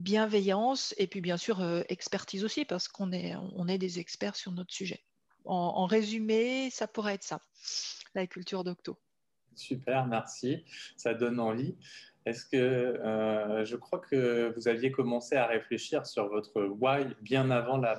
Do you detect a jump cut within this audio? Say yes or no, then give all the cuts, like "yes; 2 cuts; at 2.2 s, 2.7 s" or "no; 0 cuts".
yes; 1 cut; at 5.3 s